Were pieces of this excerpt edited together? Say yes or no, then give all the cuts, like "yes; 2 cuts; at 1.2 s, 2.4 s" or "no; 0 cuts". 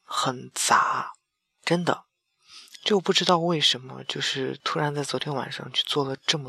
no; 0 cuts